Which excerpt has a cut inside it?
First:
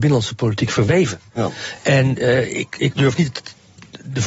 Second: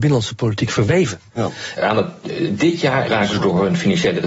second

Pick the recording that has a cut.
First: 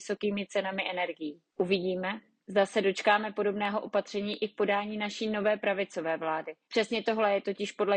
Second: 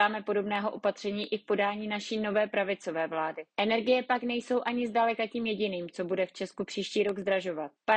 second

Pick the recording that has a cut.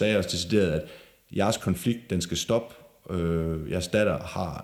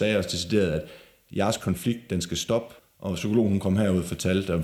second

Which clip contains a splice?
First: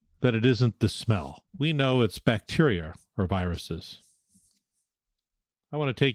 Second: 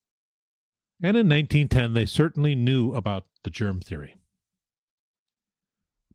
first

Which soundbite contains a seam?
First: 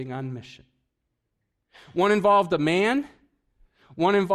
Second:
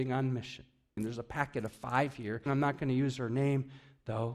second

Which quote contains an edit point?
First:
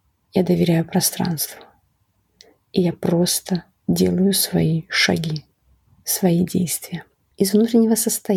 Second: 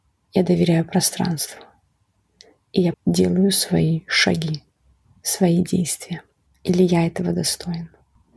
second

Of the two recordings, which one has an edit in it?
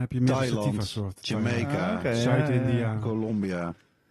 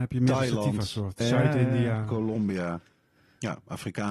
second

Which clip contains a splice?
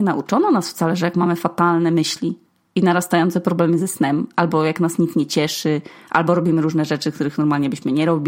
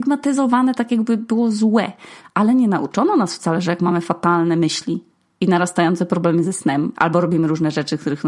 second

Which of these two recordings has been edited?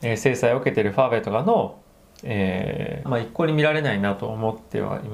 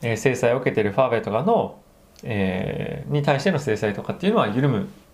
first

